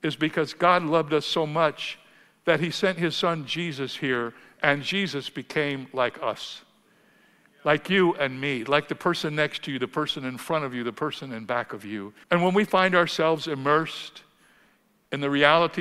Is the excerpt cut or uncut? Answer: cut